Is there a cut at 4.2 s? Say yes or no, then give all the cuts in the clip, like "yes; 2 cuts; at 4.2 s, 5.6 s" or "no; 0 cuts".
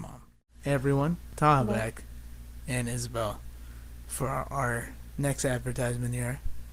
no; 0 cuts